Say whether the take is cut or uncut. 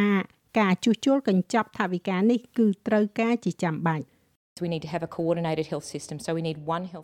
uncut